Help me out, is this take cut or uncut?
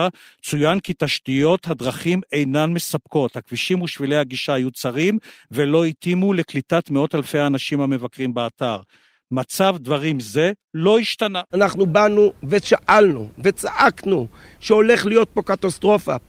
cut